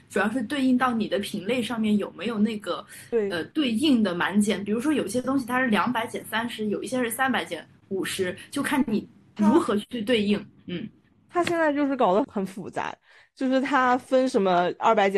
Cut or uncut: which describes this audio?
cut